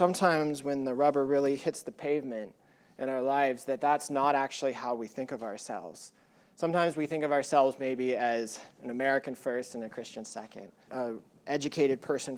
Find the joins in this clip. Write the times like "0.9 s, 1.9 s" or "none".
10.9 s